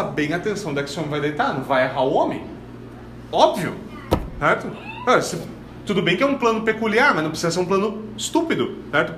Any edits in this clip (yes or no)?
no